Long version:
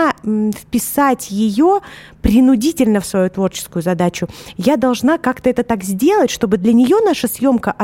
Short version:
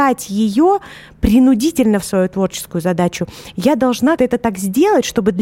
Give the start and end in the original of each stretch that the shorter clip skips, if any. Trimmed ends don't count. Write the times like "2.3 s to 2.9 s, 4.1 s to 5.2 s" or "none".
5.2 s to 5.4 s